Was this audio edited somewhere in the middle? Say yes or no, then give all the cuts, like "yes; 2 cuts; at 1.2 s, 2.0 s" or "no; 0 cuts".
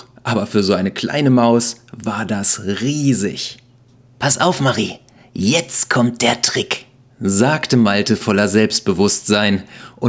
no; 0 cuts